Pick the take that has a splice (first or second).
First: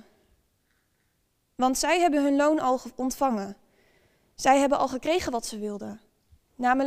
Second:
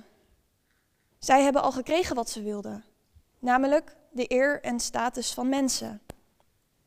second